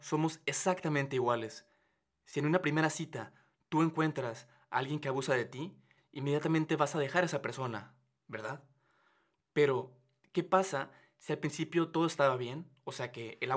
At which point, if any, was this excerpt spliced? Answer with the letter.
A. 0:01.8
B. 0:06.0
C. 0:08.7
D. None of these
B